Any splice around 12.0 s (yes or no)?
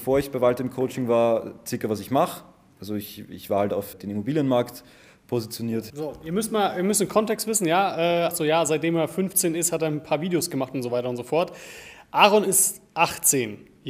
no